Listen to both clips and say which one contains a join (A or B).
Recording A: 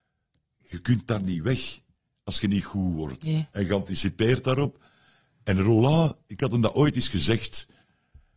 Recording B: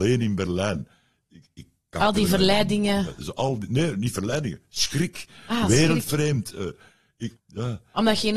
B